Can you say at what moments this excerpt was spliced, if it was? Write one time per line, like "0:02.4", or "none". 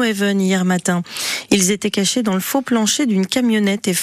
none